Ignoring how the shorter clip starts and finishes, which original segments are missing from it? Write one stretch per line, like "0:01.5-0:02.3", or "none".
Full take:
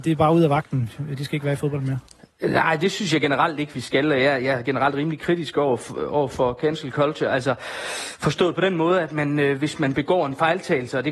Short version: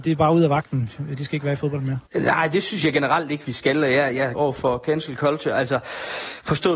0:02.1-0:02.3
0:04.6-0:06.1